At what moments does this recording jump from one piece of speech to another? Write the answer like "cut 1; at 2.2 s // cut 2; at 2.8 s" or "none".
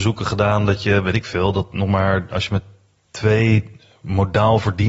none

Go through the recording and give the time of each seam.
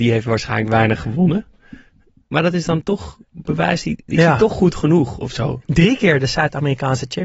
cut 1; at 5.6 s

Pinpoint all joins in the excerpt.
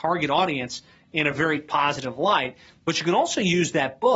none

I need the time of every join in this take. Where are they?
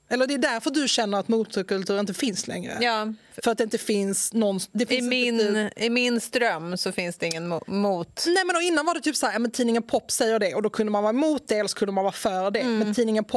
none

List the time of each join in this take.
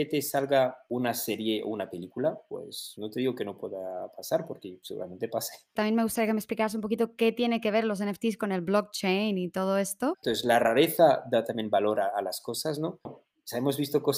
cut 1; at 10.1 s // cut 2; at 13.1 s

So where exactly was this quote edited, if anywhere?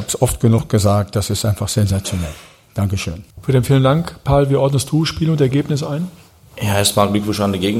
cut 1; at 3.3 s

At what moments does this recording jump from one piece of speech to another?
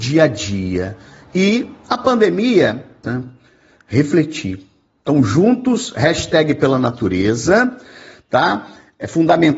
cut 1; at 3.0 s

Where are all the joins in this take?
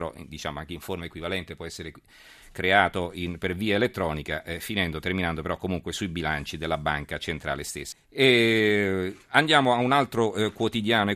cut 1; at 7.9 s

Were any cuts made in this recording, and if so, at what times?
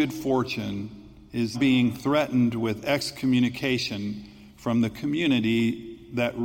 cut 1; at 1.5 s

